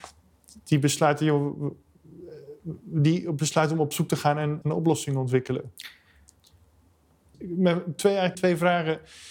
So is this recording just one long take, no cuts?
no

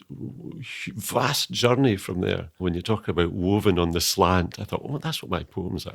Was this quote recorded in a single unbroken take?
no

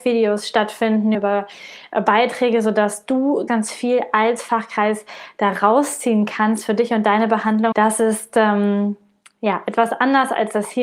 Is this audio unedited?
no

